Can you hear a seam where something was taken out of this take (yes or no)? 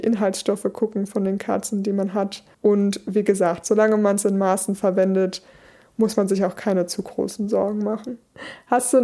yes